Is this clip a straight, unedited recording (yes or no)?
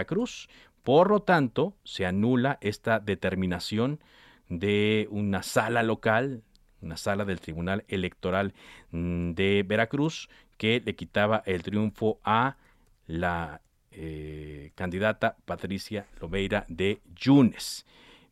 yes